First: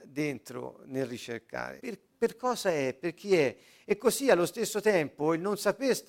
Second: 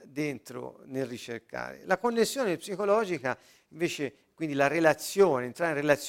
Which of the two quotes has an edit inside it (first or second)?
first